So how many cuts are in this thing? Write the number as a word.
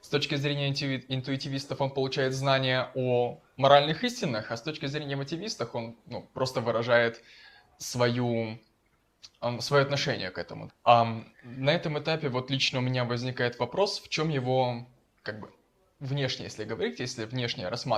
one